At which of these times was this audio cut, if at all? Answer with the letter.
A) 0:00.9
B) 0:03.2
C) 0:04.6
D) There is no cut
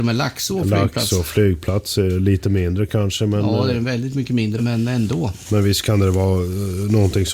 C